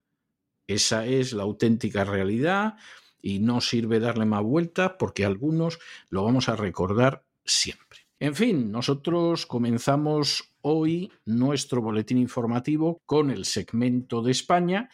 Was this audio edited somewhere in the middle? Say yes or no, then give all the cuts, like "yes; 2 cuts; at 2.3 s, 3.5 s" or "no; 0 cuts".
yes; 2 cuts; at 8.2 s, 13.0 s